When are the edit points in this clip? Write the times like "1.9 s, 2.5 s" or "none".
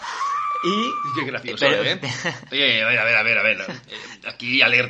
none